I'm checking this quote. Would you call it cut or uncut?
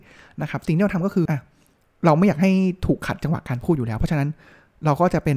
cut